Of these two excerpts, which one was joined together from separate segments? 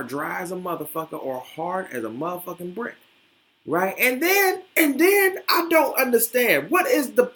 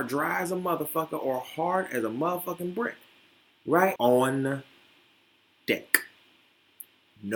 second; 1 cut; at 4.0 s

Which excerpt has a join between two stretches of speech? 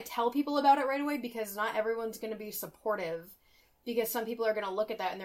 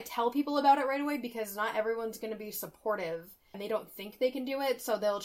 second; 1 cut; at 3.5 s

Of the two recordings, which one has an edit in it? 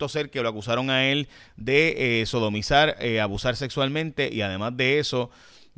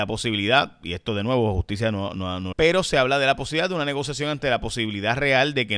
second; 1 cut; at 2.5 s

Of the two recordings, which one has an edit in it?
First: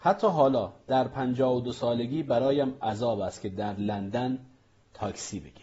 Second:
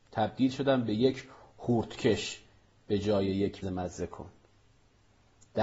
second; 1 cut; at 3.6 s

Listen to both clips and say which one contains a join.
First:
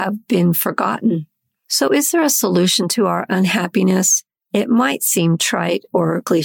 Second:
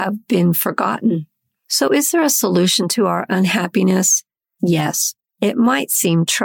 first; 1 cut; at 4.4 s

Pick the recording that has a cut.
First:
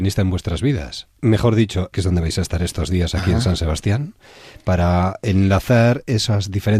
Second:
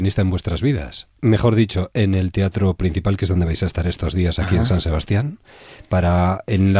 first; 1 cut; at 1.9 s

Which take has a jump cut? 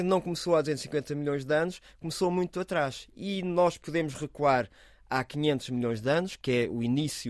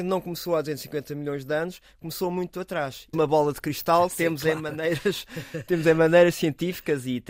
second; 1 cut; at 3.1 s

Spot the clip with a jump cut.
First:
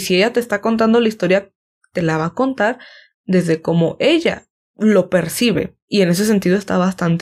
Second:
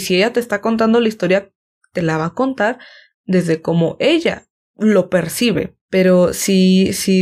second; 1 cut; at 5.8 s

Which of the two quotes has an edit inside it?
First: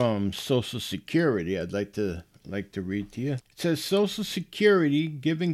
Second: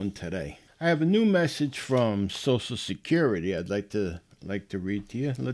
first; 1 cut; at 3.4 s

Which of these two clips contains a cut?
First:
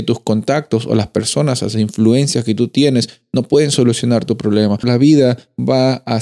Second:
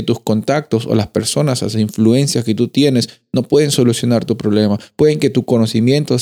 first; 1 cut; at 4.8 s

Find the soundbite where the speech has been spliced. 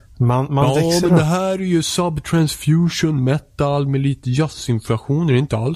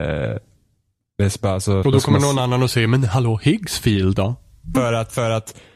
second; 2 cuts; at 1.8 s, 4.7 s

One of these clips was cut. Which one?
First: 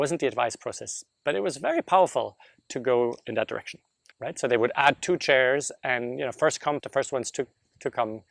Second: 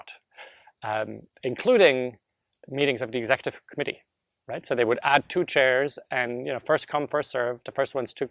first; 2 cuts; at 4.1 s, 6.8 s

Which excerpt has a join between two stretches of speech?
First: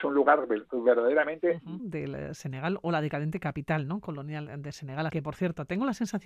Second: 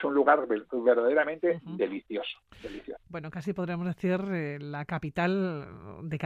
first; 2 cuts; at 1.8 s, 5.1 s

